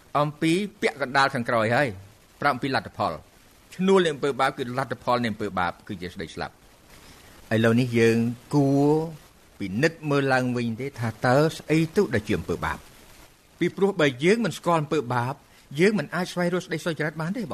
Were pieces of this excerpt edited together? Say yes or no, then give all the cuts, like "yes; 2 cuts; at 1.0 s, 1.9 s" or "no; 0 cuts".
no; 0 cuts